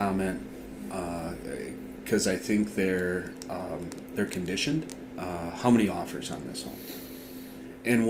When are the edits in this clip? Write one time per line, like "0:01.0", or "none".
0:05.1